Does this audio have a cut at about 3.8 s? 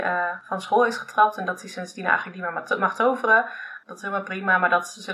yes; 1 cut; at 3.8 s

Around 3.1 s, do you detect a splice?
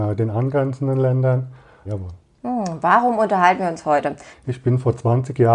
no; 2 cuts; at 1.8 s, 4.3 s

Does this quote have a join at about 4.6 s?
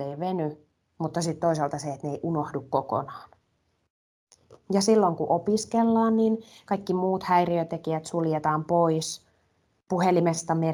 yes; 1 cut; at 4.6 s

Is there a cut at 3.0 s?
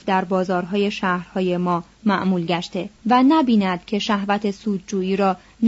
yes; 1 cut; at 3.0 s

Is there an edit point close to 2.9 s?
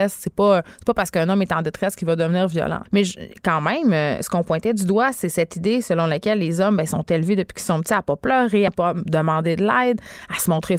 yes; 2 cuts; at 2.9 s, 8.7 s

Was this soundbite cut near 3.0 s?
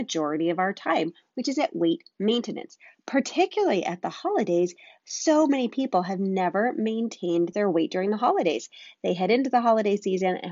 no; 0 cuts

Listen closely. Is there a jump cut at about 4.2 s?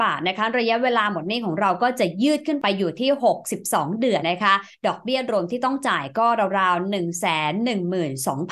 yes; 1 cut; at 4.2 s

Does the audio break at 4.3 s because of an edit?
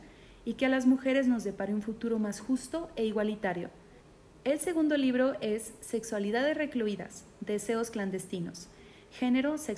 yes; 1 cut; at 4.3 s

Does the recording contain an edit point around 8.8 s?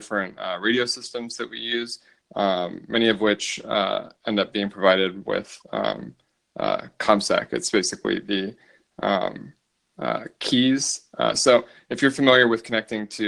no; 0 cuts

